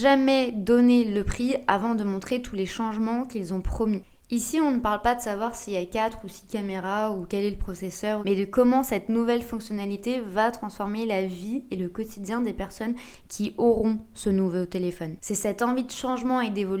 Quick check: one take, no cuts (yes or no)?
no